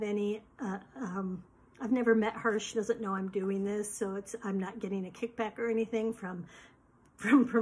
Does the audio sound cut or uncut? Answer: uncut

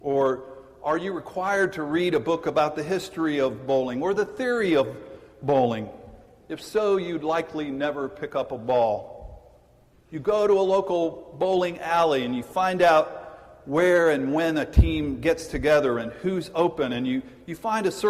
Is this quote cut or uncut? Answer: cut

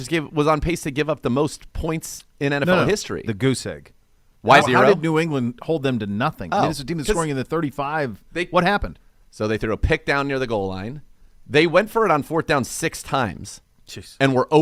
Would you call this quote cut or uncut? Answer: cut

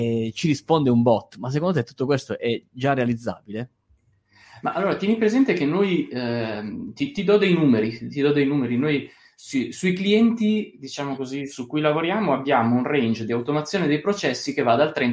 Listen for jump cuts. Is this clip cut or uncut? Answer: uncut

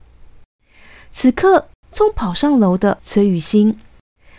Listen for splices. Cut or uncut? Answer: cut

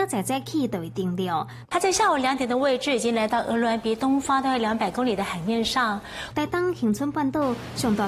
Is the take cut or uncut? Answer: cut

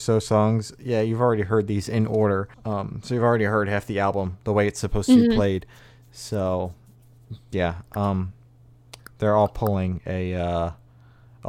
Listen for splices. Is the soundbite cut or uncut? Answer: cut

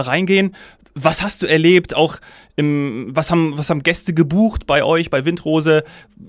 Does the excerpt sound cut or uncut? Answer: uncut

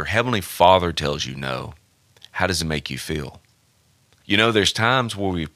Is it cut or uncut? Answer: cut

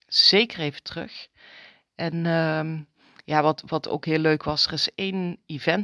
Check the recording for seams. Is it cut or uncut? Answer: uncut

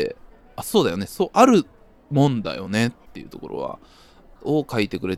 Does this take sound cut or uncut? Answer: uncut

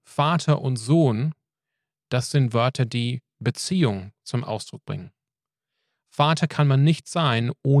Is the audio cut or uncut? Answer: uncut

